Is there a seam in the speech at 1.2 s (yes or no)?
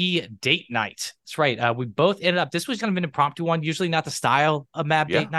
no